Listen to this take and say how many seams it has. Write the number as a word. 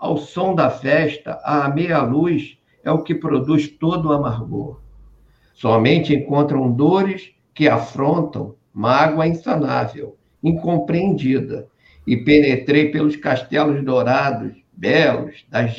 one